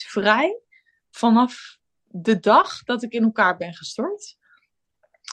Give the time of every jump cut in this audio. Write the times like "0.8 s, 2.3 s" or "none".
none